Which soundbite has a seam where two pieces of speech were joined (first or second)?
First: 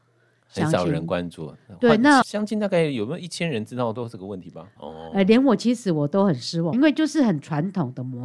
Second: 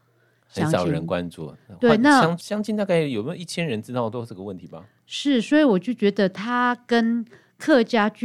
first